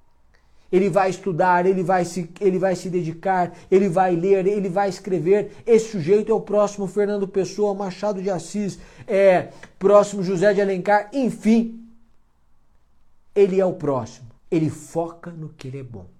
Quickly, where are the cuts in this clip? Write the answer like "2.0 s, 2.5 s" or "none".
14.4 s